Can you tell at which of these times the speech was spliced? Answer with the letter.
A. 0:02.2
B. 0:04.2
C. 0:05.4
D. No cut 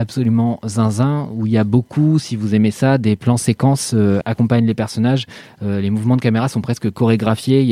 B